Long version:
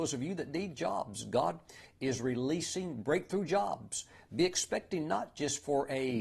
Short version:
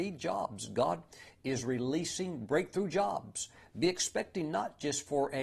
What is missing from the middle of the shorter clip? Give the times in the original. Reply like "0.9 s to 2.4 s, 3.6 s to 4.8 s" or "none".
none

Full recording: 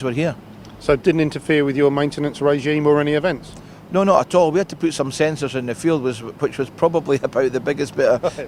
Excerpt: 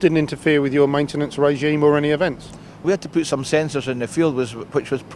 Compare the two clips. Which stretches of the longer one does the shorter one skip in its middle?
3.9 s to 4.5 s

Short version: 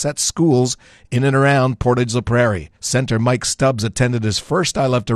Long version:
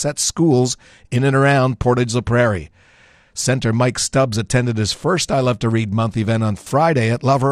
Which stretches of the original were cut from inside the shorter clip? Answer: 2.8 s to 3.3 s

